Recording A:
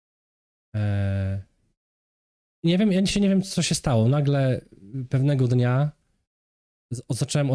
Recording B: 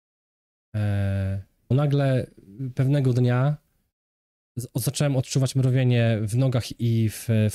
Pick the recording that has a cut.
B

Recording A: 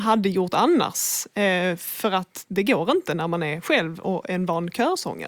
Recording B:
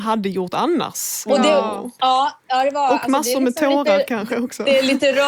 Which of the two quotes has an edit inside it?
B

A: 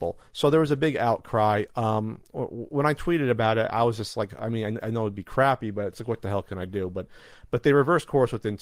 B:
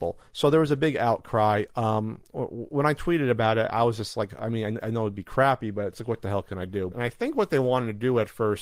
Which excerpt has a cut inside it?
B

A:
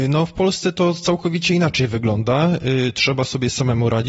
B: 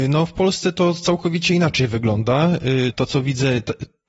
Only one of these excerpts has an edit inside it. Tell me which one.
B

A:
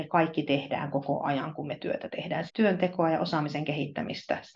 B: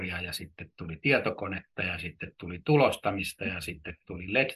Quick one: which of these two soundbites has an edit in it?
A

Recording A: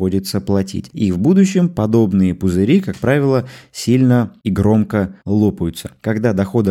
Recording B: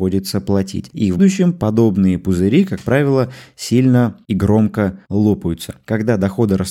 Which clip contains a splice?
B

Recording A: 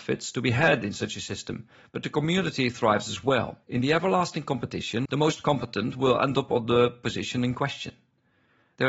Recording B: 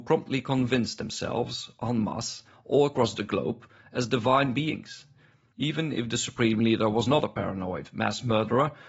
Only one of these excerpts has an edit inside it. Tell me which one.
A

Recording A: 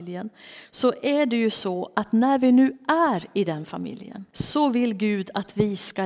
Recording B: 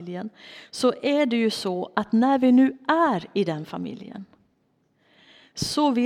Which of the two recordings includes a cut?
A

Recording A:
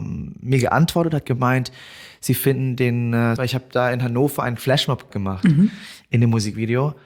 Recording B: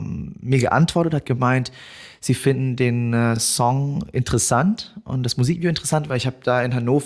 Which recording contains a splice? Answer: A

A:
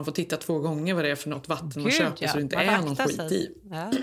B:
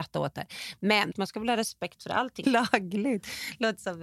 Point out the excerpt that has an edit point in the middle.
B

